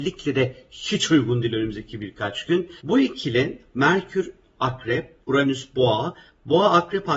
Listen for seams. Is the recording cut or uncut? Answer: cut